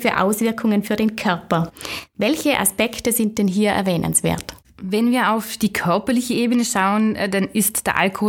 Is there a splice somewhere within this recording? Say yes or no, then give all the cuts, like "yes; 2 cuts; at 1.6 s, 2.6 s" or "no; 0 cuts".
no; 0 cuts